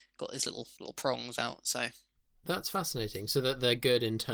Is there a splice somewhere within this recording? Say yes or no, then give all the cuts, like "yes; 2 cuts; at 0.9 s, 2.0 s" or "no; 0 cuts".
no; 0 cuts